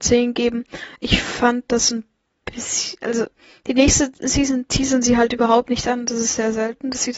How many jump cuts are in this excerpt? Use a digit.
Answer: 0